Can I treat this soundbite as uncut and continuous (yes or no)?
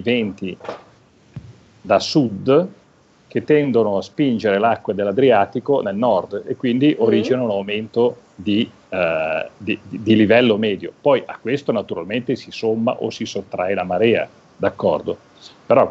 no